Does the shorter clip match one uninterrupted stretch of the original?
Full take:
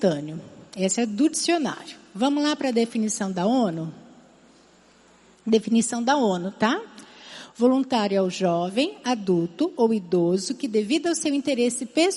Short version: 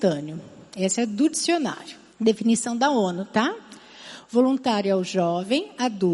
no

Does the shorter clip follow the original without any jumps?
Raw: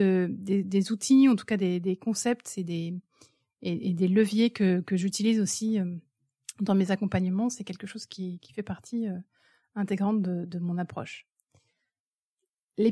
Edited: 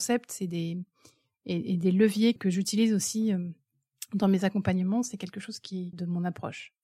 no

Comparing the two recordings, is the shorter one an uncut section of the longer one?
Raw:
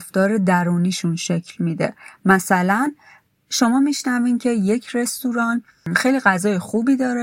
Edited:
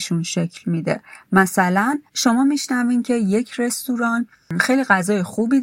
no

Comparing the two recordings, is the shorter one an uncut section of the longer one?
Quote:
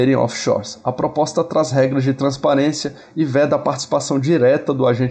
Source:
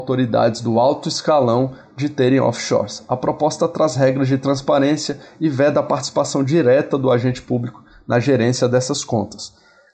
yes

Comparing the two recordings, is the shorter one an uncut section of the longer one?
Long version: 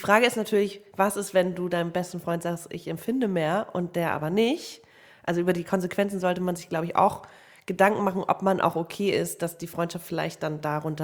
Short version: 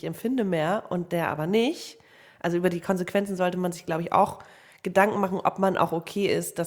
yes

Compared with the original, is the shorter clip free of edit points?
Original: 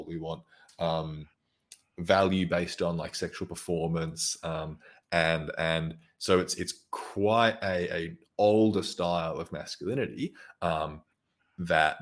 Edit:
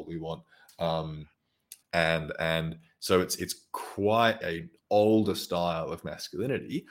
no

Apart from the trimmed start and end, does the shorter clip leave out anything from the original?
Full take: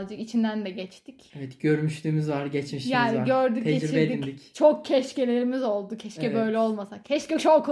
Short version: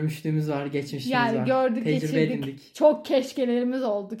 no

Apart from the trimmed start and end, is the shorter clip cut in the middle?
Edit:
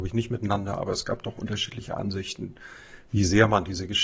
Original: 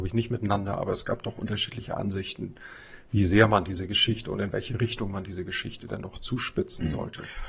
no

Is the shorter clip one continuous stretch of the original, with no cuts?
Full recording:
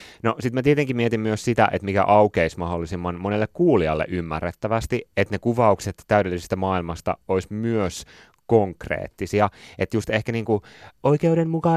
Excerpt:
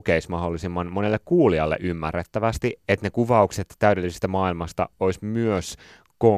yes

